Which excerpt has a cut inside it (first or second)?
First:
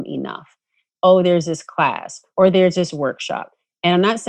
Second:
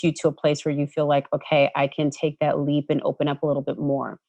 first